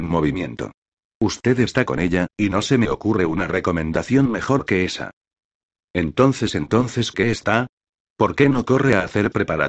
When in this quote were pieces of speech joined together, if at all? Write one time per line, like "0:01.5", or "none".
none